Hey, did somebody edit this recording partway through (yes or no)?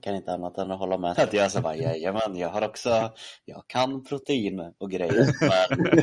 yes